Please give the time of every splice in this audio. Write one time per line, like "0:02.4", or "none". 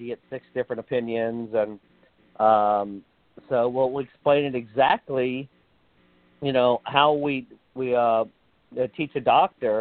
none